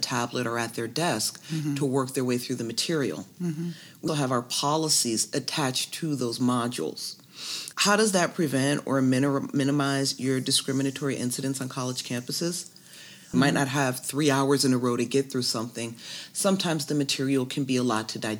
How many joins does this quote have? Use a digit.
3